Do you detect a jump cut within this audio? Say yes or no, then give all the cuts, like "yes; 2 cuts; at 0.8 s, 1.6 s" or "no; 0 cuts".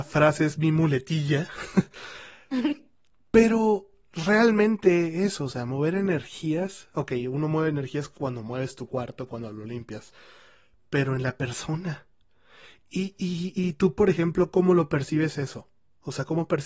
no; 0 cuts